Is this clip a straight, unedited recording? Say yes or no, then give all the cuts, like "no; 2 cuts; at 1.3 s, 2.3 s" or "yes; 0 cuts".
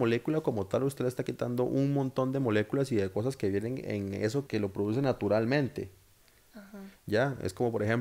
no; 1 cut; at 4.5 s